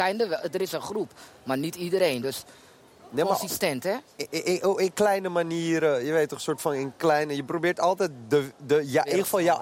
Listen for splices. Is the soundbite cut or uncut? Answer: uncut